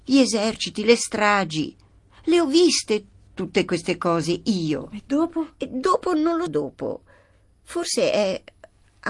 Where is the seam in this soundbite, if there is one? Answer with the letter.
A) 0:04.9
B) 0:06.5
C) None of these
B